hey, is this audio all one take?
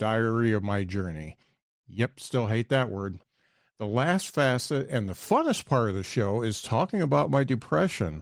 yes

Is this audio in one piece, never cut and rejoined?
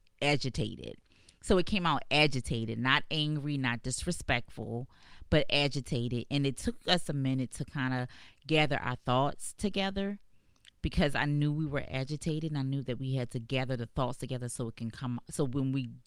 yes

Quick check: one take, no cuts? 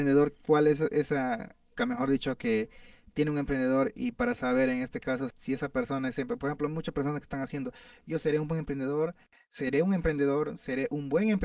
no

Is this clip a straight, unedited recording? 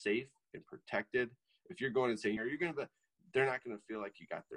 no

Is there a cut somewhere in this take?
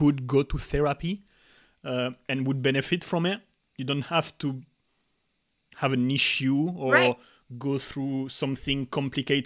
no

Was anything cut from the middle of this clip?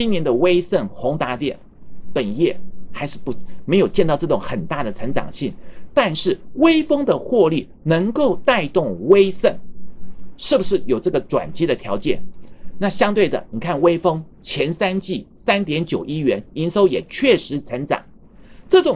no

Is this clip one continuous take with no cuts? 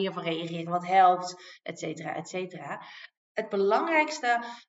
no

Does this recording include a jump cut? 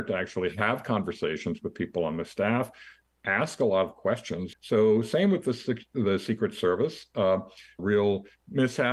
yes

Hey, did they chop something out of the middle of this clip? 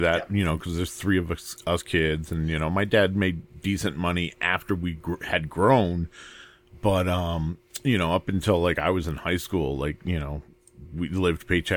no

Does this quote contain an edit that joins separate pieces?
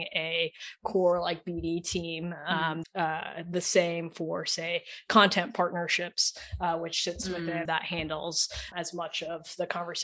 yes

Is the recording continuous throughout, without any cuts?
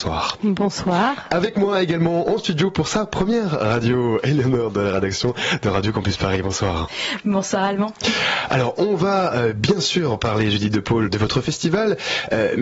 no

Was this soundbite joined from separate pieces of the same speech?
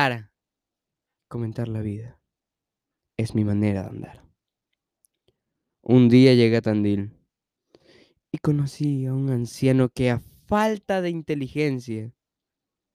no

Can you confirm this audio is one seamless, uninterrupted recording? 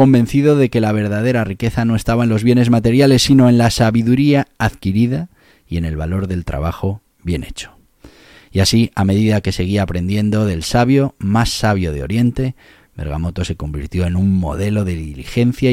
yes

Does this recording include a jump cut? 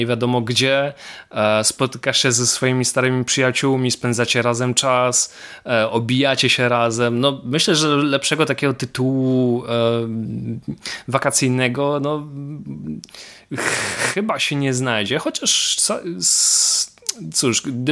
no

